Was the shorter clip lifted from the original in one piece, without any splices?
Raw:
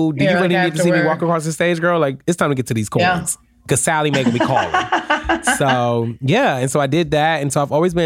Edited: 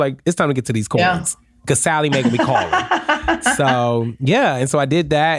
yes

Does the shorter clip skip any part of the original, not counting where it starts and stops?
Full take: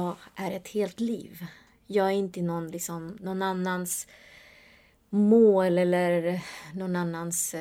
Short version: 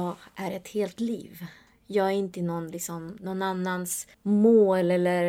yes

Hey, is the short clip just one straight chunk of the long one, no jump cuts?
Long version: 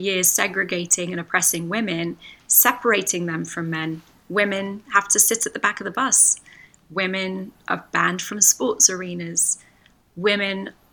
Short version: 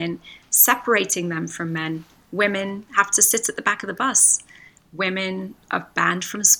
yes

